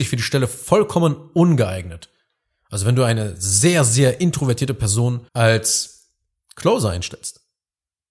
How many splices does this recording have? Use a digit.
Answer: 1